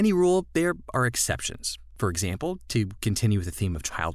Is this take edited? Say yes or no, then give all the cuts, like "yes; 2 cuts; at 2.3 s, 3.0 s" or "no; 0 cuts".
no; 0 cuts